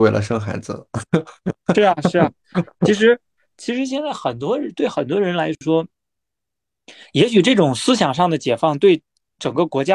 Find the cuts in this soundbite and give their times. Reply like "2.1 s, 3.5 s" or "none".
none